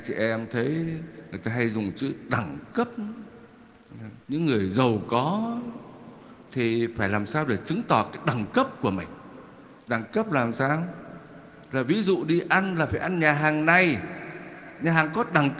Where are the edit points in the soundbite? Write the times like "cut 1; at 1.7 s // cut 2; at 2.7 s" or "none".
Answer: cut 1; at 4.2 s // cut 2; at 9.8 s